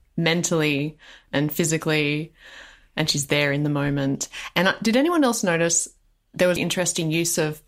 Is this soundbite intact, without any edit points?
no; 1 cut; at 6.6 s

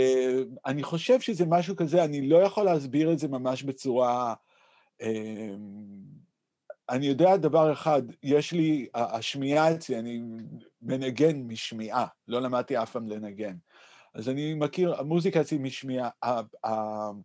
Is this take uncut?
yes; 0 cuts

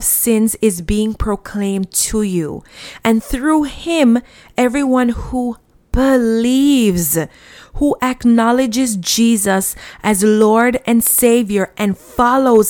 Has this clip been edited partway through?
no; 0 cuts

